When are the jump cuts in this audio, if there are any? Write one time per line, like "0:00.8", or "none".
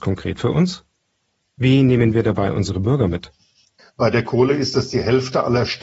0:03.8